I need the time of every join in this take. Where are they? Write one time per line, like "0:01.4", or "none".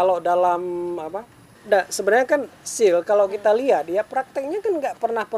0:01.6